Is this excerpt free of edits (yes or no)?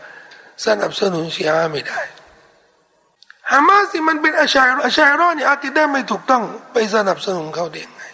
no